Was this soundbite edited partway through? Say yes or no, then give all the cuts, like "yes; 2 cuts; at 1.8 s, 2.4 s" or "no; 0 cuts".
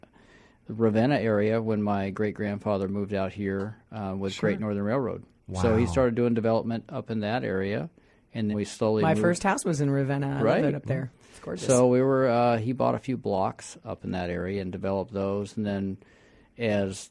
yes; 1 cut; at 8.5 s